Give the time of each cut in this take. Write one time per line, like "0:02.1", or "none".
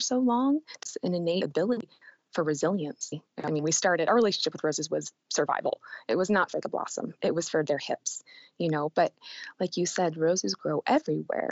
none